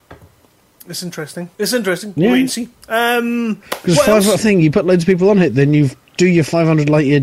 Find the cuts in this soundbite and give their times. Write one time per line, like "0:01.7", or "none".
0:01.5
0:04.4